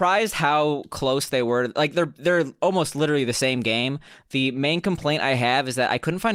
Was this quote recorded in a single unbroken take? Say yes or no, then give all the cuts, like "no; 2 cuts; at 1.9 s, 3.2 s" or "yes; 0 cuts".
yes; 0 cuts